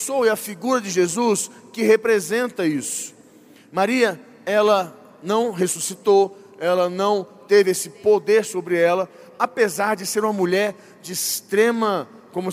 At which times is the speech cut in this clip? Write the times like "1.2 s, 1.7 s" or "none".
none